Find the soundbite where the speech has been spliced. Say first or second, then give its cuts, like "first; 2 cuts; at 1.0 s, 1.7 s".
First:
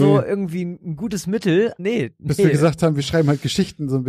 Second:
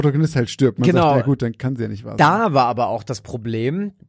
first; 1 cut; at 1.8 s